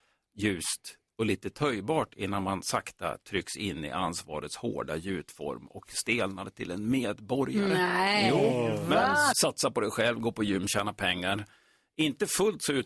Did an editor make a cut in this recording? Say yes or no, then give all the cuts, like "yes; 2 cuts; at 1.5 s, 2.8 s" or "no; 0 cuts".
yes; 1 cut; at 9.3 s